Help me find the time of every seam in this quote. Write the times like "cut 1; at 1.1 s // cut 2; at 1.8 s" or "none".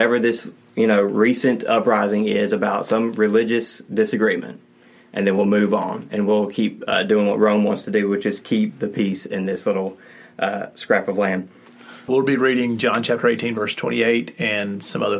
cut 1; at 12.1 s